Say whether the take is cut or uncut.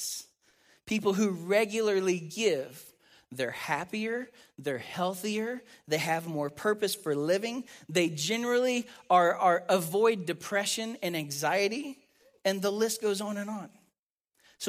uncut